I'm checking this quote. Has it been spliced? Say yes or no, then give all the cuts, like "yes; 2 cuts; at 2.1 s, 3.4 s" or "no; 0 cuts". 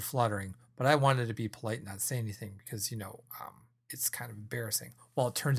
no; 0 cuts